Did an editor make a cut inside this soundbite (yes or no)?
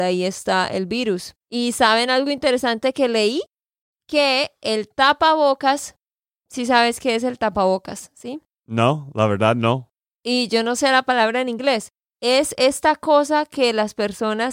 yes